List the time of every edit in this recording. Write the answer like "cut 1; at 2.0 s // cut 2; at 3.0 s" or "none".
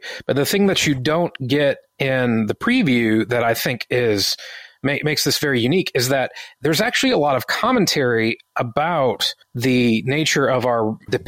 cut 1; at 9.4 s